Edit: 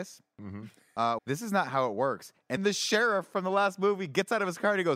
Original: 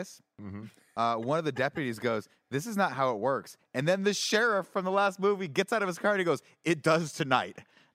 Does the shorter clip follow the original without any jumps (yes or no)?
no